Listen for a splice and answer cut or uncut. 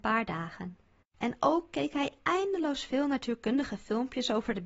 cut